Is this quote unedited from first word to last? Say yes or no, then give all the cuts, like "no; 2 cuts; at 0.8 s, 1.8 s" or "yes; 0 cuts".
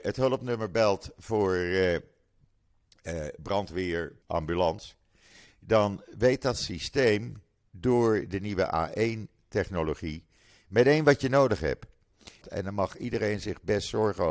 no; 2 cuts; at 4.2 s, 12.4 s